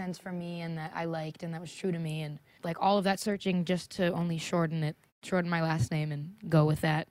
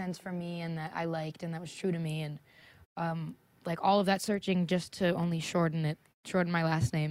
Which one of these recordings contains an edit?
first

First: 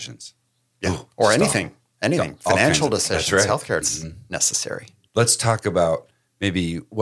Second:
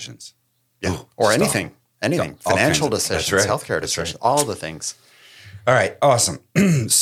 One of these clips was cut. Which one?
first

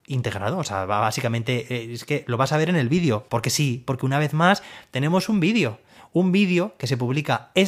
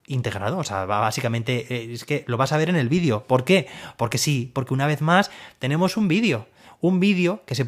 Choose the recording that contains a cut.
first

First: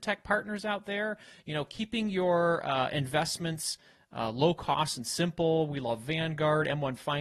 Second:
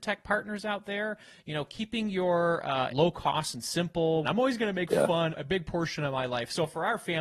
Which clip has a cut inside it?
second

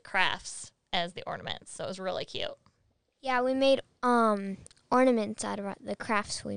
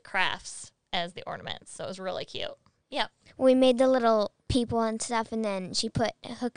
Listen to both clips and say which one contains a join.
second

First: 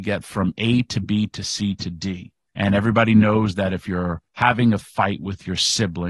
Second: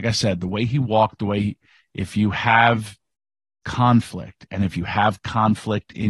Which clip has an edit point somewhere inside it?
first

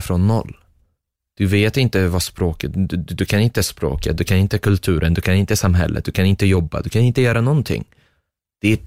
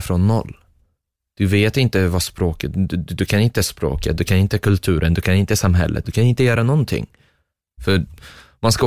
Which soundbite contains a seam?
second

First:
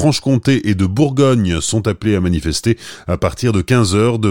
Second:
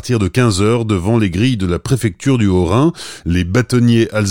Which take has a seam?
second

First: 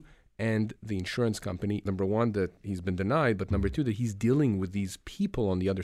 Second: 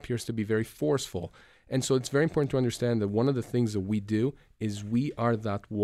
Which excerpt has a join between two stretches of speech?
first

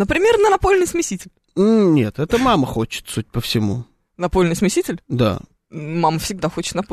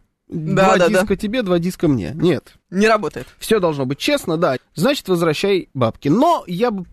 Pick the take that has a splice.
second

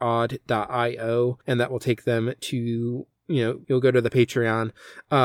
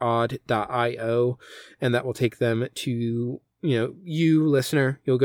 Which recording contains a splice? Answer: first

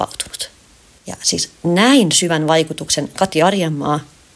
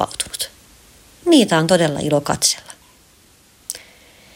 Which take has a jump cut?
first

